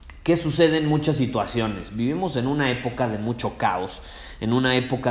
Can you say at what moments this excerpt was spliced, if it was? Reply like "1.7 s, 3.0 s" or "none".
none